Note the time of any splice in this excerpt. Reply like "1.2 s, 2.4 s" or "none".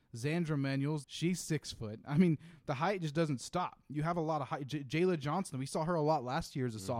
1.0 s